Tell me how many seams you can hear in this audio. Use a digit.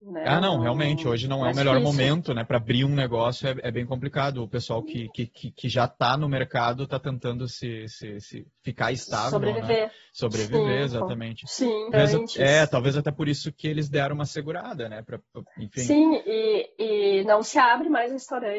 1